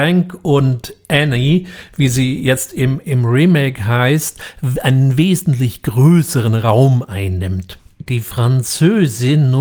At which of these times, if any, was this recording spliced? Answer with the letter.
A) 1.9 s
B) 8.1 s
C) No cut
B